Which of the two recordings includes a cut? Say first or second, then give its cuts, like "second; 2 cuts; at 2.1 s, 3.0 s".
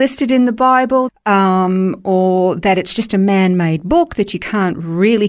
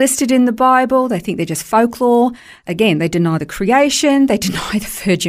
first; 1 cut; at 1.1 s